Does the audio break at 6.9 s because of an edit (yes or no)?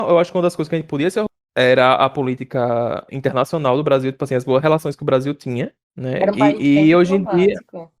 no